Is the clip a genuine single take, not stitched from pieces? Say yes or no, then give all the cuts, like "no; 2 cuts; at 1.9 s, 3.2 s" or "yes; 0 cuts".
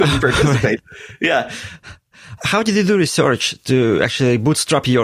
yes; 0 cuts